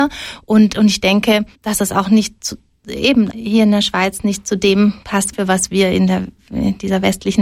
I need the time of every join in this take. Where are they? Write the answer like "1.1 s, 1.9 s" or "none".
1.5 s, 3.3 s, 5.3 s

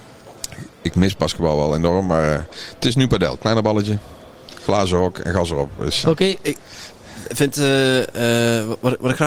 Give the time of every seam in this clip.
6.0 s

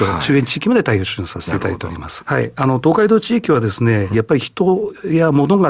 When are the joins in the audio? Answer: 2.2 s, 4.1 s

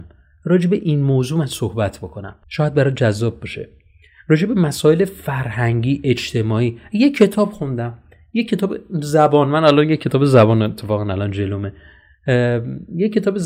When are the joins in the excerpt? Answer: 2.4 s

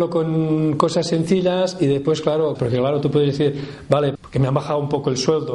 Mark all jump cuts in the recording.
2.5 s, 4.1 s

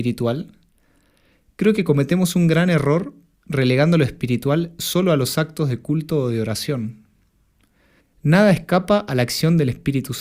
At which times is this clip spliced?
8.0 s

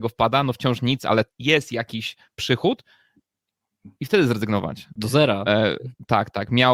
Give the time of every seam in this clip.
1.3 s, 5.0 s

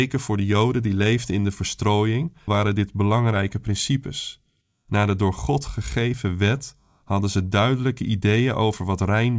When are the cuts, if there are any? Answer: 2.5 s

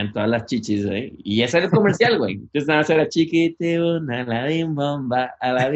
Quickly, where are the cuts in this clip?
none

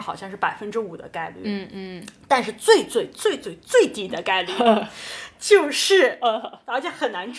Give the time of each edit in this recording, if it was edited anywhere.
none

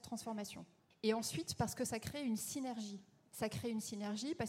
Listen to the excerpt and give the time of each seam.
0.9 s

